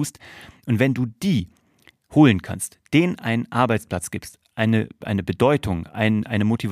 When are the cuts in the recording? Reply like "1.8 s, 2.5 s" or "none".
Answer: none